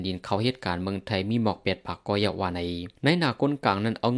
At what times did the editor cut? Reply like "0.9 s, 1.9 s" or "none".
3.0 s